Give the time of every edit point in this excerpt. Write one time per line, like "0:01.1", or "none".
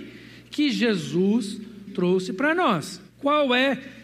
0:01.9

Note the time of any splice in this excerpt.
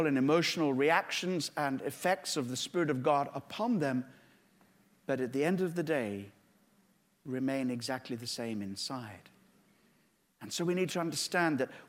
none

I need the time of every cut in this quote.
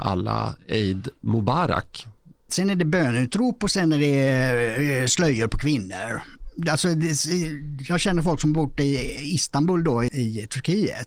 0:02.5
0:10.1

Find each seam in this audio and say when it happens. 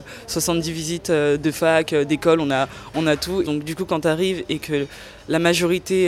0:03.4

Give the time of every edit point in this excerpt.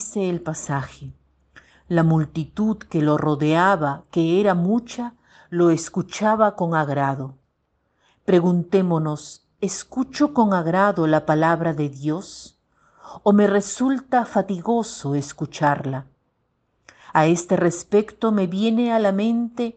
none

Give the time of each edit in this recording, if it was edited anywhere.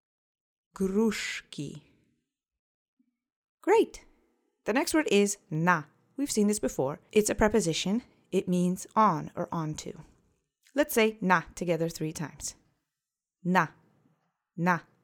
none

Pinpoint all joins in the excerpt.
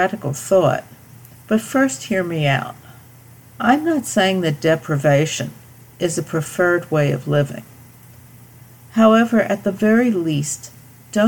0:03.5

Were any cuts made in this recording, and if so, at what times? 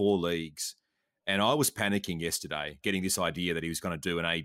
0:02.8

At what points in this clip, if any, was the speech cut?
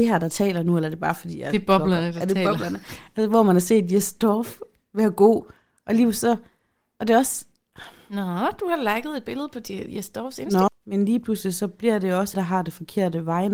0:10.7
0:12.3

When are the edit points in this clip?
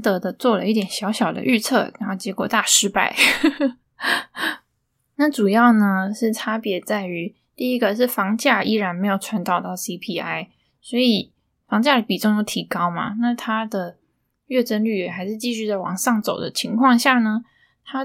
none

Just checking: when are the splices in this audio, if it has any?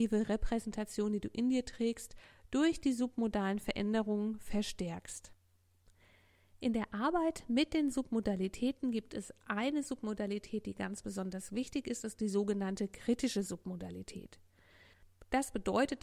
none

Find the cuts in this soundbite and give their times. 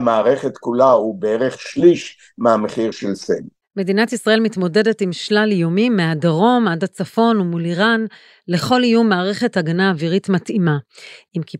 none

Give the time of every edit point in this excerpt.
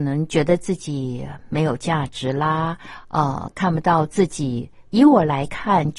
0:04.9

